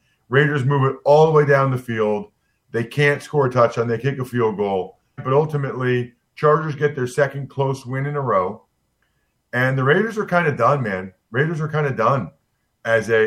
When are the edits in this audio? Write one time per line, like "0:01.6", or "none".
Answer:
0:05.2

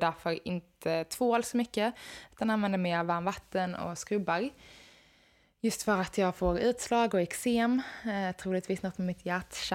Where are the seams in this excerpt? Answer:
none

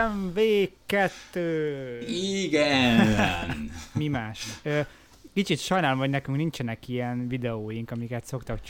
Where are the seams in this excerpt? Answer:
none

